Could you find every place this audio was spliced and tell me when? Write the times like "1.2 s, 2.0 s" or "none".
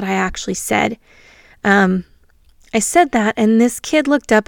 none

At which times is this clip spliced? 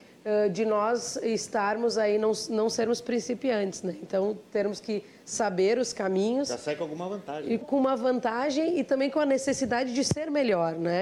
7.6 s

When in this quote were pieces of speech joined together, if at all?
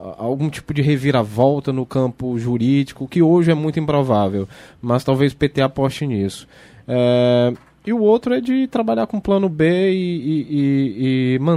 none

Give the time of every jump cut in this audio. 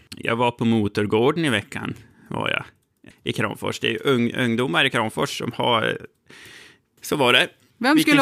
3.1 s, 7.0 s

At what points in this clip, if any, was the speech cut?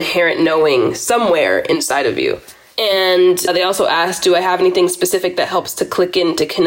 none

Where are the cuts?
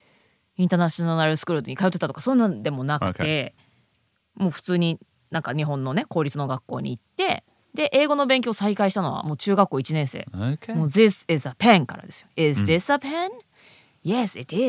none

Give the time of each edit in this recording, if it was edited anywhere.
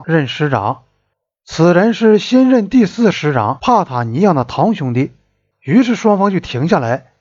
3.1 s, 5.5 s

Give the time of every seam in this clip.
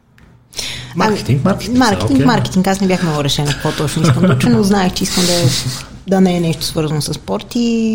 none

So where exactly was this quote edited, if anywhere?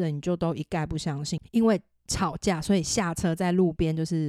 1.4 s

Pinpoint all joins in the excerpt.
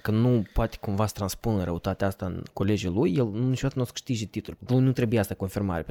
4.6 s

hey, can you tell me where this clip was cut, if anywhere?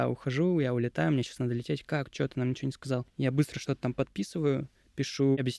none

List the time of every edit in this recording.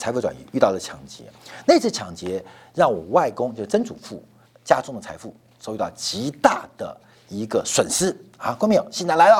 4.4 s

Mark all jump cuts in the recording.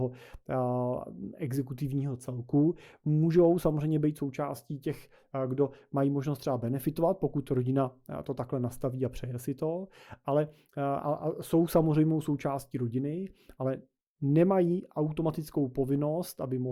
none

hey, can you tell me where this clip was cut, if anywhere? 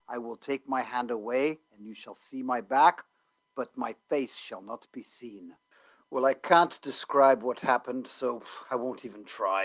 none

